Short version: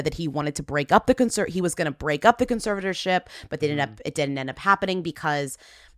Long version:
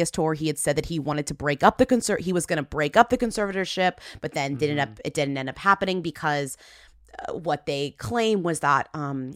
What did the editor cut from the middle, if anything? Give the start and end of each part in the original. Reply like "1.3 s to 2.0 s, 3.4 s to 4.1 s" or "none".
4.3 s to 4.6 s

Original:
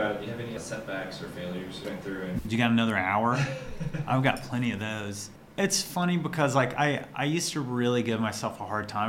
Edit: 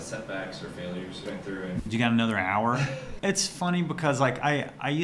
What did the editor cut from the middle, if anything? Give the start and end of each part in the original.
3.8 s to 5.5 s

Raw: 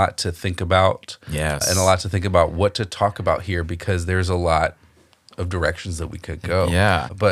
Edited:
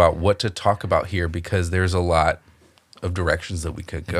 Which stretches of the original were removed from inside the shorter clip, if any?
none

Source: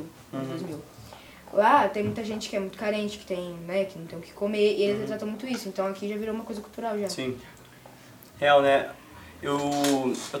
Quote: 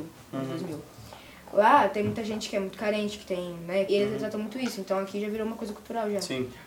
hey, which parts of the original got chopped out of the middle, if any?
3.9 s to 4.8 s

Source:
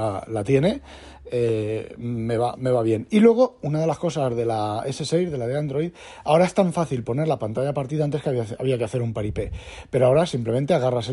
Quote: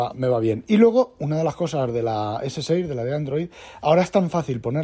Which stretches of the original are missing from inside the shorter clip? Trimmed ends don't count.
none

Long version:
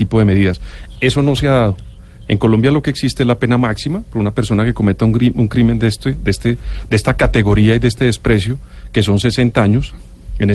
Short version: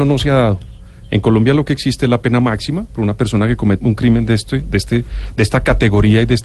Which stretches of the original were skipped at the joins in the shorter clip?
5.0 s to 5.3 s

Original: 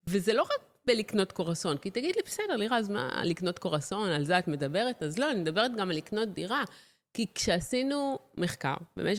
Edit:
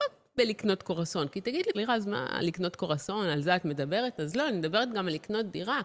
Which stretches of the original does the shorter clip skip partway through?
2.2 s to 2.6 s

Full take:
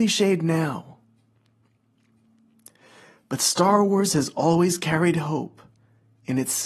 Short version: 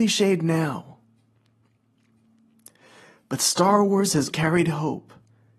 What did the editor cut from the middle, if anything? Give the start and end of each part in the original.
4.3 s to 4.8 s

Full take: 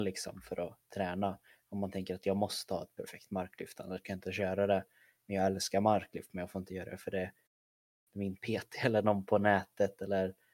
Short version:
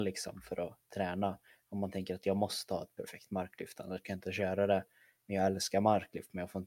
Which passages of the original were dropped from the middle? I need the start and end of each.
none

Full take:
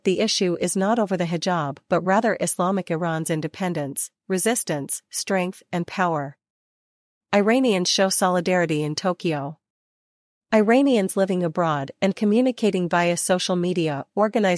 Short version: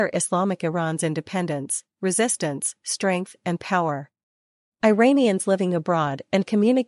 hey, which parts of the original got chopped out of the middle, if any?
6.9 s to 10.4 s

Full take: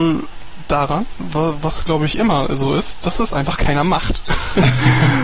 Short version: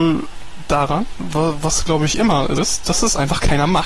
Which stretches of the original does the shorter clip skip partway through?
2.6 s to 2.7 s

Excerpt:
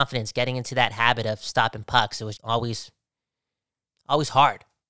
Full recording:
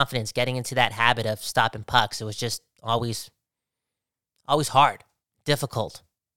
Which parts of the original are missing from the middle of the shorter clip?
2.4 s to 2.8 s

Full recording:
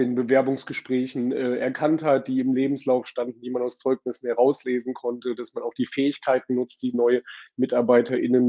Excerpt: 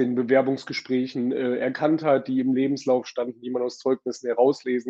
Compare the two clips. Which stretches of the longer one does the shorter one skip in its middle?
none

